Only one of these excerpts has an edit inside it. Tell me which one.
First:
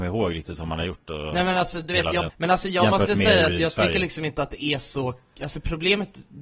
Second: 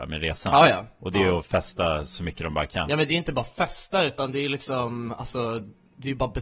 first; 1 cut; at 2.3 s

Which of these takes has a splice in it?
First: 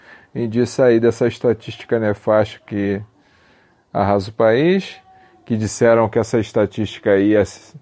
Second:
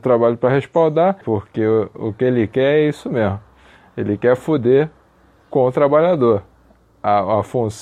second; 1 cut; at 1.2 s

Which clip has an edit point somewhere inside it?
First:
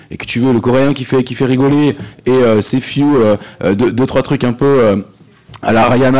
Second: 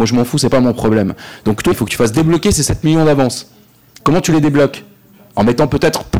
second; 1 cut; at 1.7 s

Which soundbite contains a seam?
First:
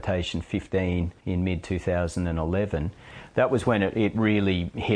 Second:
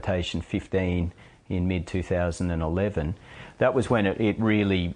first; 1 cut; at 1.2 s

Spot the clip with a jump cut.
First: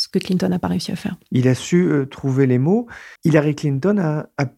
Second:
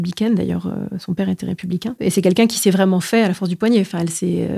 first; 1 cut; at 3.2 s

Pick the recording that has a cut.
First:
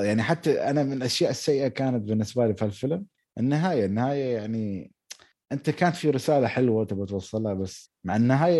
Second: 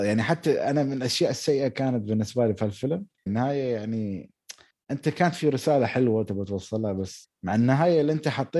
second; 1 cut; at 3.3 s

